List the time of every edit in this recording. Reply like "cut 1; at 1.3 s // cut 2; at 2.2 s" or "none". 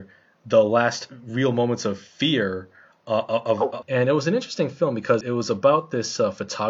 cut 1; at 3.8 s // cut 2; at 5.2 s